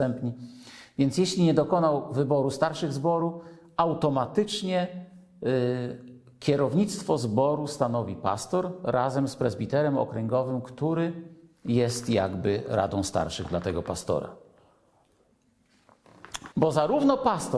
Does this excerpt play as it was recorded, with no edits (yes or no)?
no